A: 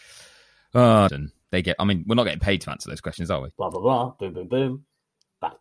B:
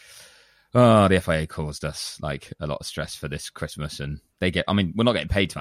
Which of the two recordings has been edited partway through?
A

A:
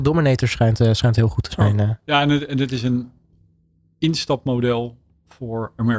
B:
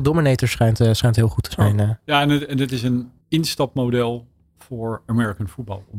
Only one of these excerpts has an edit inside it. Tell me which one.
B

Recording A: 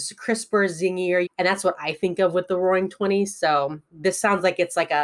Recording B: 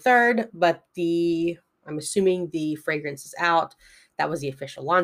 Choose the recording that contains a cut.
A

